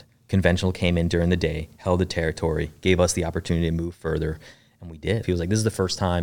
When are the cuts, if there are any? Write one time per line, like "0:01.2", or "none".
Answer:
0:05.2